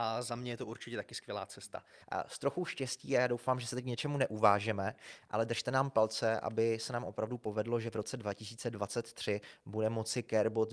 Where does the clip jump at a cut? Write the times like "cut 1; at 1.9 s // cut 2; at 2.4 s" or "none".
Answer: cut 1; at 2.0 s